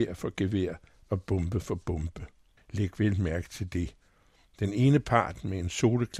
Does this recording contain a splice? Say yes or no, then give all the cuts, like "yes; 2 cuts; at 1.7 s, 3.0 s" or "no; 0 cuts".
yes; 1 cut; at 2.6 s